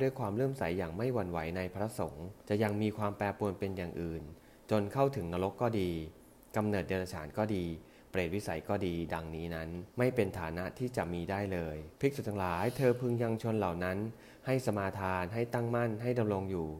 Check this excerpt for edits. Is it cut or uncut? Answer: cut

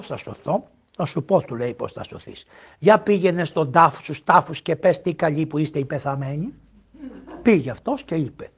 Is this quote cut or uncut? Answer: uncut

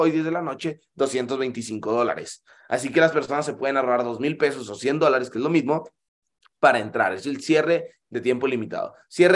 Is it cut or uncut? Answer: uncut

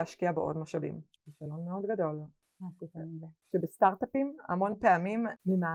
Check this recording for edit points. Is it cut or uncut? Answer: cut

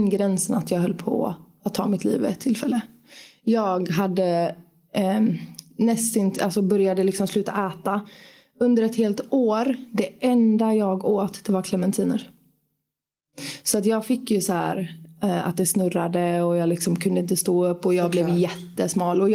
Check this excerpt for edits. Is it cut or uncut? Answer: uncut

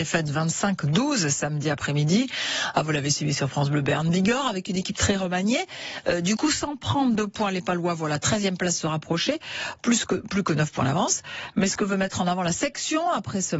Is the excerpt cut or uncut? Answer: uncut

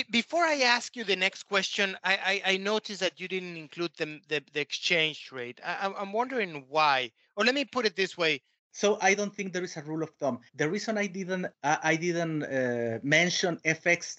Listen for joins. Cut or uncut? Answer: cut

